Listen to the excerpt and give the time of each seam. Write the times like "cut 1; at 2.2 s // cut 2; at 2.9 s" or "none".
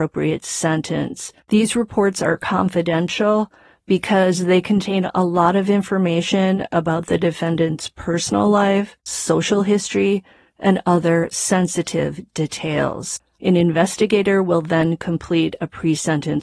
cut 1; at 13.4 s